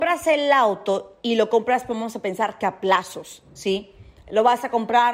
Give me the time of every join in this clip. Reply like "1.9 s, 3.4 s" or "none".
none